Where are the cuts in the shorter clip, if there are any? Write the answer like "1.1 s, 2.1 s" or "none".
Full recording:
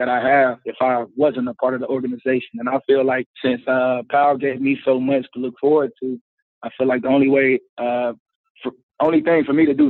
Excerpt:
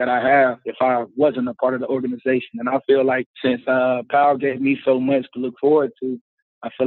none